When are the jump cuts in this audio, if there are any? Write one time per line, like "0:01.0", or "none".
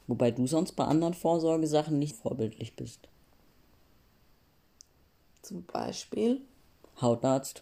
0:02.1